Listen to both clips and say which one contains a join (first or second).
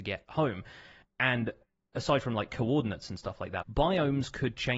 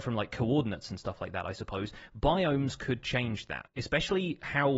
first